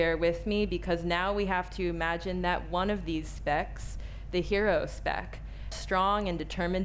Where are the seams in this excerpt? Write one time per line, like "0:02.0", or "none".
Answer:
0:05.7

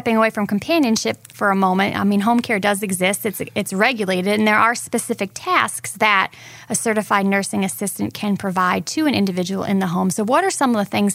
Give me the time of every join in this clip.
none

